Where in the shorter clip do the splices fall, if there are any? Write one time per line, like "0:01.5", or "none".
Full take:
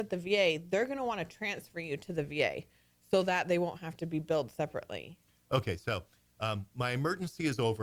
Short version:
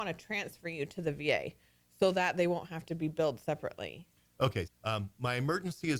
0:04.7